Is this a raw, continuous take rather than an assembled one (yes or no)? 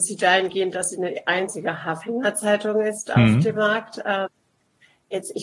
yes